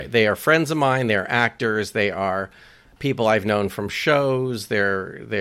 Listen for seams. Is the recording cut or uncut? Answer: uncut